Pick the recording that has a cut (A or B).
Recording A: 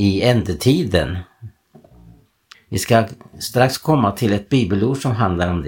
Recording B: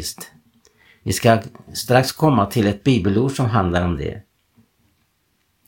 A